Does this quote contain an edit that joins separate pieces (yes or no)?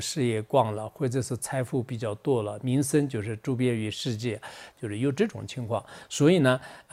yes